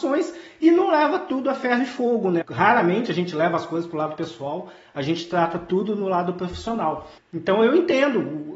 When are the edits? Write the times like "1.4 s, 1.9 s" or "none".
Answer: 2.4 s, 7.2 s